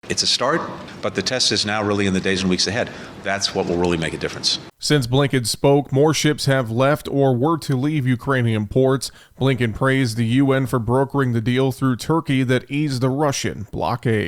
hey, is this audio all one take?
no; 1 cut; at 3.2 s

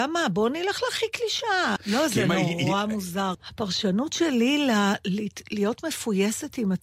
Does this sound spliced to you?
yes; 2 cuts; at 1.8 s, 3.3 s

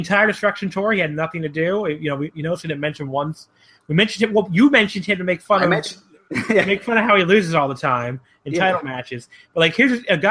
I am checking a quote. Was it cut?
no; 0 cuts

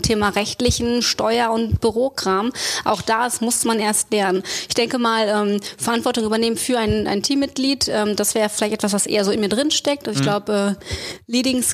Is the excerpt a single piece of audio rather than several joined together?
yes; 0 cuts

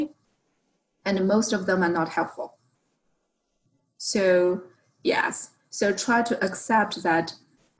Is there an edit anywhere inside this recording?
no; 0 cuts

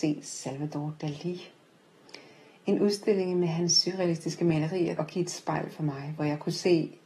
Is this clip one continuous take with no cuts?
no; 1 cut; at 5.0 s

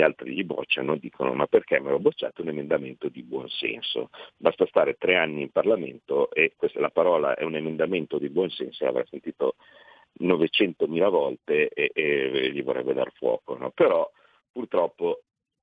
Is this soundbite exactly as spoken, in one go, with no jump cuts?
yes; 0 cuts

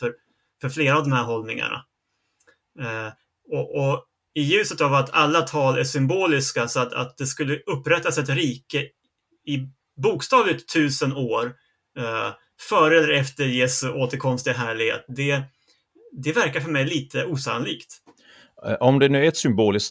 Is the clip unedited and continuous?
yes; 0 cuts

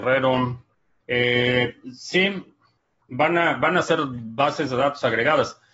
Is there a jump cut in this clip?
yes; 1 cut; at 1.0 s

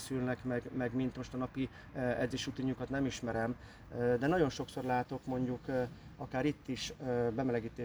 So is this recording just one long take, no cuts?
yes; 0 cuts

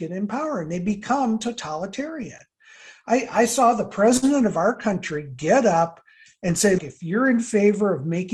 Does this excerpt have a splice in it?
yes; 1 cut; at 6.8 s

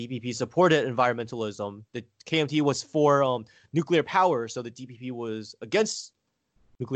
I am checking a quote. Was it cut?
no; 0 cuts

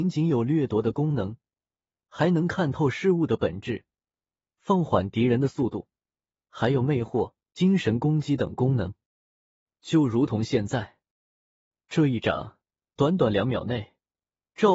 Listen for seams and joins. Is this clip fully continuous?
yes; 0 cuts

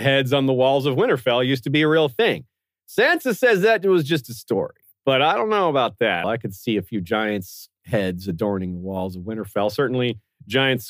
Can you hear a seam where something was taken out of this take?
yes; 1 cut; at 6.2 s

